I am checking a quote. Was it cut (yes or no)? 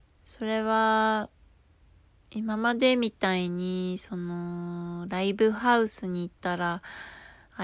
no